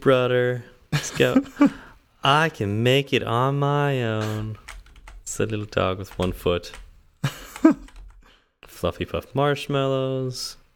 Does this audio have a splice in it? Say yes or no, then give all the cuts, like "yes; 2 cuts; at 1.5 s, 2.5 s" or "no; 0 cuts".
no; 0 cuts